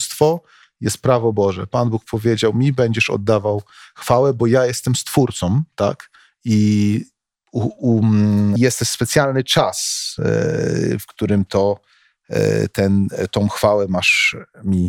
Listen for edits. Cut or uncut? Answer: cut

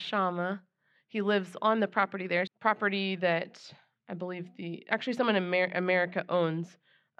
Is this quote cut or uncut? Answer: cut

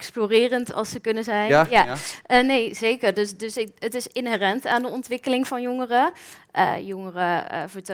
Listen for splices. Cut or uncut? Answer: uncut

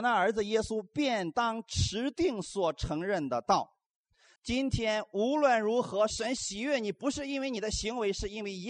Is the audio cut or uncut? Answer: cut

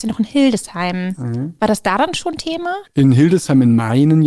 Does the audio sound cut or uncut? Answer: cut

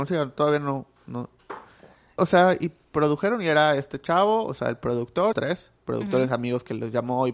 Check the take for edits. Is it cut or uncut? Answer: cut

